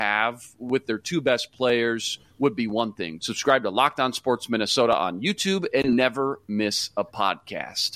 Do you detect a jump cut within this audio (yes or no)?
yes